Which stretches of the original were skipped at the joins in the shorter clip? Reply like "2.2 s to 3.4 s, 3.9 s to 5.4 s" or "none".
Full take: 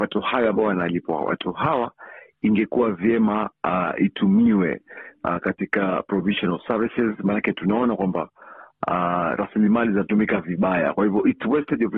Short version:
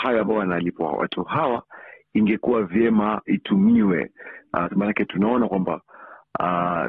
3.6 s to 4.0 s, 5.4 s to 7.2 s